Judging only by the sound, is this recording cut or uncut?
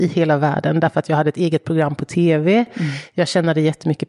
uncut